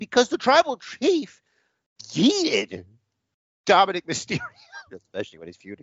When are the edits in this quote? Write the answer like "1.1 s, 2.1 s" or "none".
4.9 s